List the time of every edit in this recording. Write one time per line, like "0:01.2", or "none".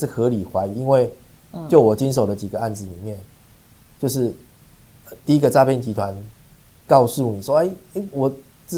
none